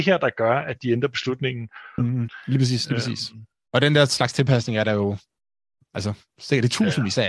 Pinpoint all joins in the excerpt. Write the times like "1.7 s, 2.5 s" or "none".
2.0 s